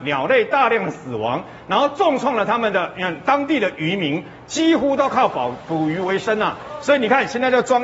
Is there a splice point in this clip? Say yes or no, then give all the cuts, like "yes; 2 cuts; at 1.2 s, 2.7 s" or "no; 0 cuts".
no; 0 cuts